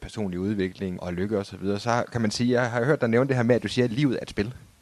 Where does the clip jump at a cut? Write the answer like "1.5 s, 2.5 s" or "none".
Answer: 1.0 s